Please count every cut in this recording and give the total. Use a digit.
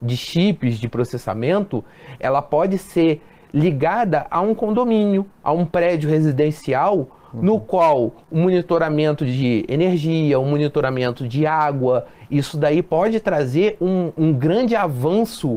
1